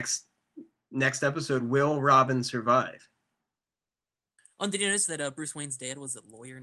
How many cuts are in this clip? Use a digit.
0